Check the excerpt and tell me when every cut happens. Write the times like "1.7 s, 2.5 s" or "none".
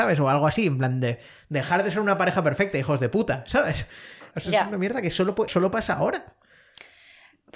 4.3 s, 5.5 s